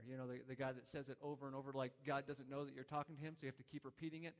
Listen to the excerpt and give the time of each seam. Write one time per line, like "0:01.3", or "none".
none